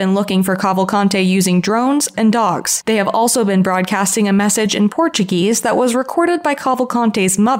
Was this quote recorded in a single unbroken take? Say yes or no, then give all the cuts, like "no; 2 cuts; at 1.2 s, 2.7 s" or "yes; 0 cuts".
no; 1 cut; at 2.1 s